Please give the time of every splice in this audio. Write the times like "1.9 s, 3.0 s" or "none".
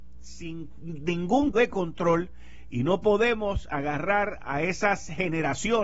1.5 s, 2.7 s